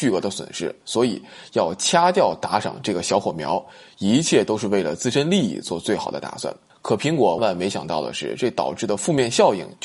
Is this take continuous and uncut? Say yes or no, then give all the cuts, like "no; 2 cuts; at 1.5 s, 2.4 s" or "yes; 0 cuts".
no; 1 cut; at 7.4 s